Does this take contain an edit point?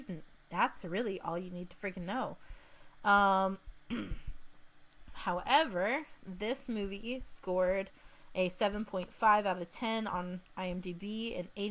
no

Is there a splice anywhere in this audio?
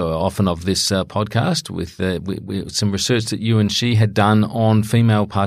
no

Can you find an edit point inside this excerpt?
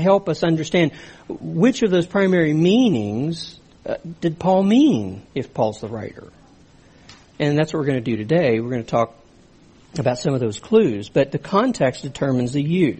no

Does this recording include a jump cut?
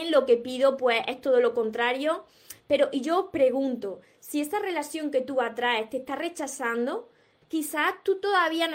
yes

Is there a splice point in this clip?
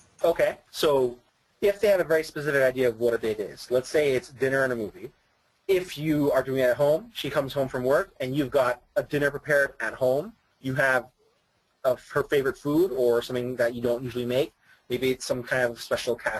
yes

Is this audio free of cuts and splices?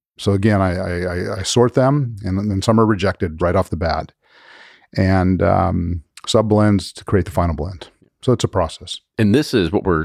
no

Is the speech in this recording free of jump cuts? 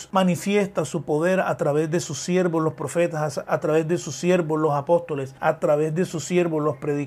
no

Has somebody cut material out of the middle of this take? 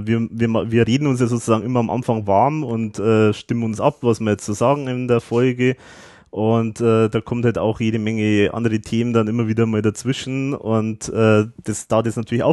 no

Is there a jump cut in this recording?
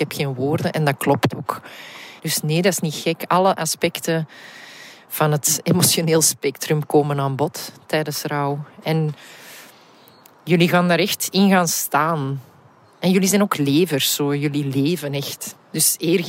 yes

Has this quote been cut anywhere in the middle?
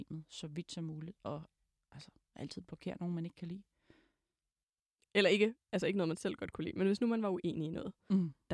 yes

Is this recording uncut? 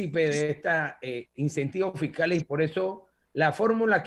yes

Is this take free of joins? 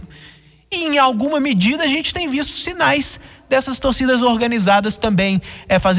yes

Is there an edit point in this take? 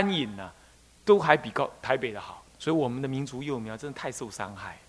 yes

